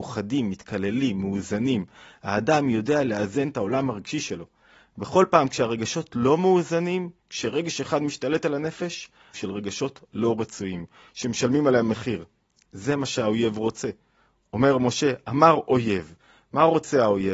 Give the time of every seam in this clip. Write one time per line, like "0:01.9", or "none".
0:09.3